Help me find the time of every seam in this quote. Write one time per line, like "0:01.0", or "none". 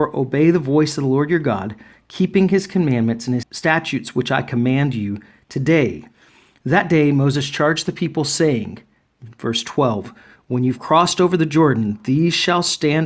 0:03.4